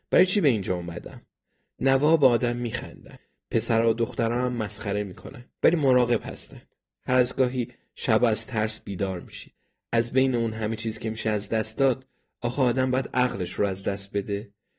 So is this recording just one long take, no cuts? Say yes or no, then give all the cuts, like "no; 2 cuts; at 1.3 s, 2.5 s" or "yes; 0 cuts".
no; 1 cut; at 5.5 s